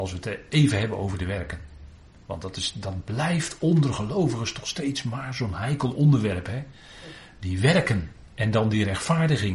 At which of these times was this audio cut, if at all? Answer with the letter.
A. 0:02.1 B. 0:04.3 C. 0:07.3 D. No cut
D